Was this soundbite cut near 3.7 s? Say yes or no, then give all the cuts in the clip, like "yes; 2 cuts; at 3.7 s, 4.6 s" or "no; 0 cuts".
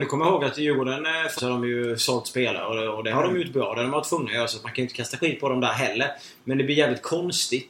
no; 1 cut; at 1.4 s